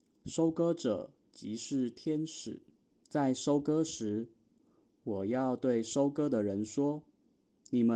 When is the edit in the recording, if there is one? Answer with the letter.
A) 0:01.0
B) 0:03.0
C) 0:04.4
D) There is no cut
B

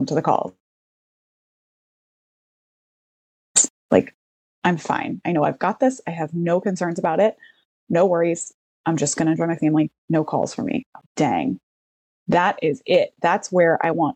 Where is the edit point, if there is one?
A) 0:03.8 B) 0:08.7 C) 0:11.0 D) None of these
C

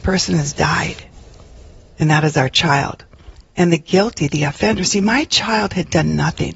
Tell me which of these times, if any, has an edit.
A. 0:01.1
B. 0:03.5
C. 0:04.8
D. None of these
D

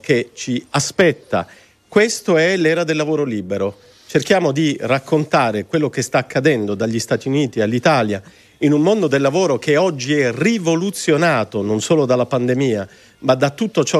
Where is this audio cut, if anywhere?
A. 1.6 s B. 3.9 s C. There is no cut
C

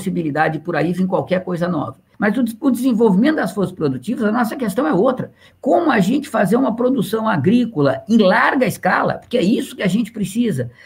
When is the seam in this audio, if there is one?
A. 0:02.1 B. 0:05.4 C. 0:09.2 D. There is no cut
A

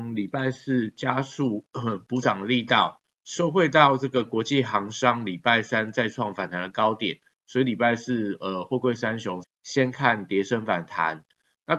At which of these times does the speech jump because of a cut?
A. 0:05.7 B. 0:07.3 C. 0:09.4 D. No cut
C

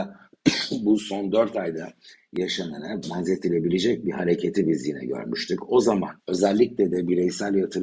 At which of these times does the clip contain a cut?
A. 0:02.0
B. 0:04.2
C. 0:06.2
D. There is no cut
C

